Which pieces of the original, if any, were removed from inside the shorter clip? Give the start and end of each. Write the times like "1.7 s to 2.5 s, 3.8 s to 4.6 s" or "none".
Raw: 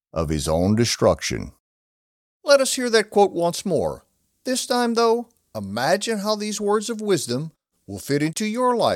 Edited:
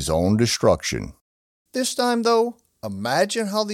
2.0 s to 4.4 s